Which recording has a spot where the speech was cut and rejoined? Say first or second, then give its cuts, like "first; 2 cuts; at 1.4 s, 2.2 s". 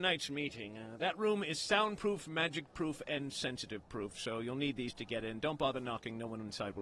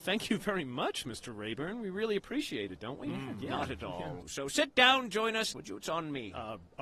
second; 2 cuts; at 4.2 s, 5.5 s